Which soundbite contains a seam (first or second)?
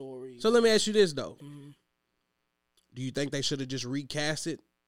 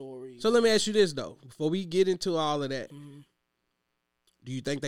first